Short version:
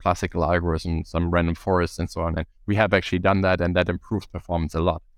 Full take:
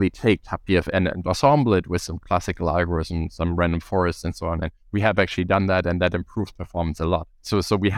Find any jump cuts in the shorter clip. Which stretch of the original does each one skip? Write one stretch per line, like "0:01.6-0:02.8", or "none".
none